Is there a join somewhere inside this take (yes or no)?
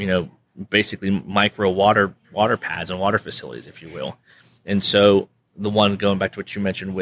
no